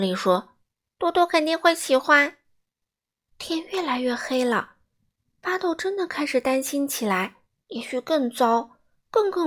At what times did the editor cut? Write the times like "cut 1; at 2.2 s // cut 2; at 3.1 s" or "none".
cut 1; at 3.3 s // cut 2; at 7.6 s